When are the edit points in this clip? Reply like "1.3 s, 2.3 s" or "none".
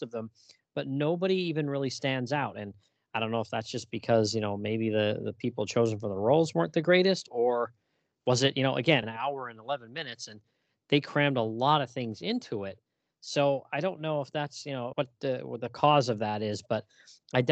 9.0 s, 14.9 s